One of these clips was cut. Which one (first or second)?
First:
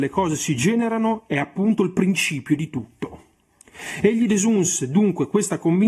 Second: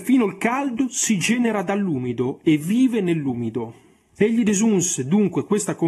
second